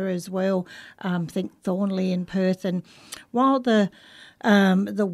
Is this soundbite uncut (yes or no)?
yes